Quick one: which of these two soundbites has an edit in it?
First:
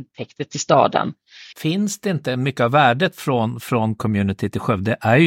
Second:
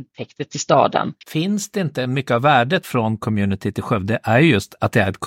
second; 2 cuts; at 1.2 s, 2.8 s

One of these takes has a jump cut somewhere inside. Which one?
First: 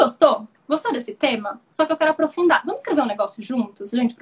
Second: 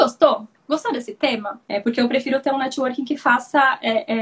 second; 1 cut; at 1.6 s

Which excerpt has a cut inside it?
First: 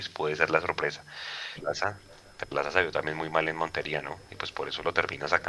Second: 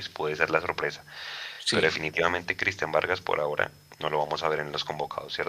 first; 1 cut; at 1.5 s

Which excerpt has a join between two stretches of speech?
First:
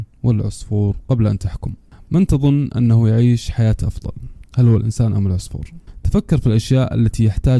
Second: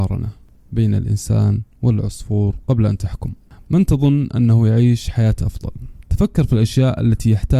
second; 1 cut; at 6.1 s

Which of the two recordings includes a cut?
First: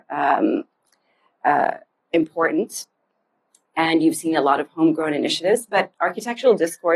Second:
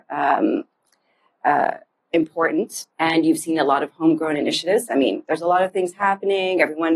second; 2 cuts; at 2.9 s, 4.9 s

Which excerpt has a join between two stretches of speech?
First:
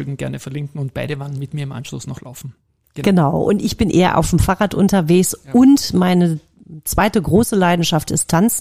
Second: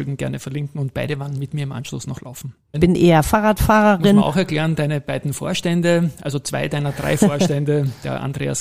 second; 1 cut; at 2.7 s

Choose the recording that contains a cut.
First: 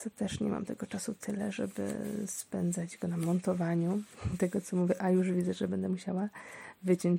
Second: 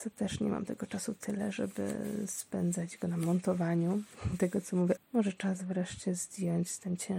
second; 1 cut; at 5.0 s

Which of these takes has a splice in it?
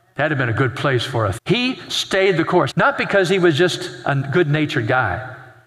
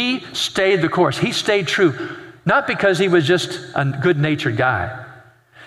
first; 2 cuts; at 1.4 s, 2.7 s

